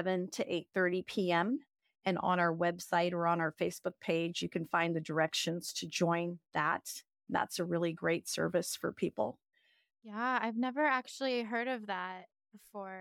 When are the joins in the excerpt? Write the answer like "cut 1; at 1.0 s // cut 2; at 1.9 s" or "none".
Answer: none

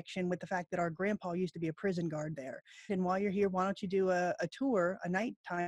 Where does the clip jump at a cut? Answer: cut 1; at 2.9 s

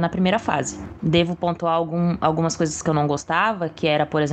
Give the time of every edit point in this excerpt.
cut 1; at 1.0 s

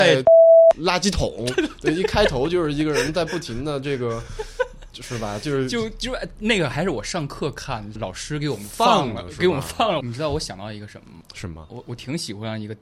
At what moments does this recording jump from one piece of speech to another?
cut 1; at 8.0 s // cut 2; at 10.0 s

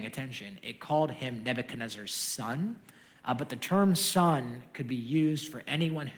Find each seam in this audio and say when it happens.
none

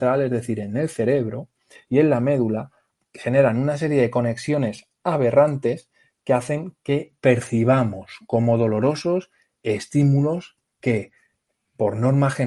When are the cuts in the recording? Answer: cut 1; at 3.0 s

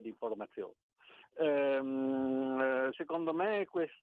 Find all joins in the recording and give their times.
cut 1; at 1.2 s // cut 2; at 2.9 s

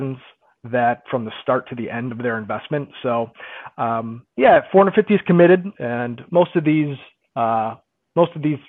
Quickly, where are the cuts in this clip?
cut 1; at 4.3 s // cut 2; at 5.7 s

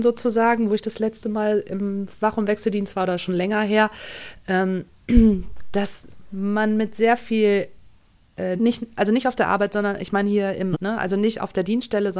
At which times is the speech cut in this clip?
cut 1; at 8.6 s // cut 2; at 10.7 s

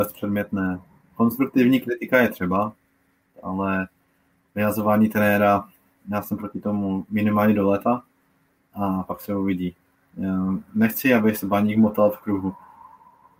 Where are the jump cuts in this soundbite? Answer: none

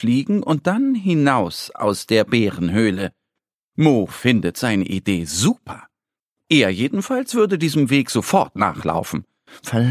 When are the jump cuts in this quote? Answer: none

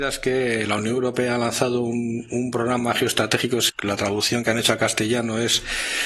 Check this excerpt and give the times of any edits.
cut 1; at 3.7 s

